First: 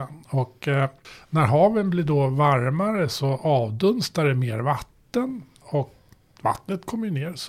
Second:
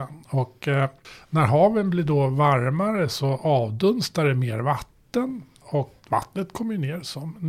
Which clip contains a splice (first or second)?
second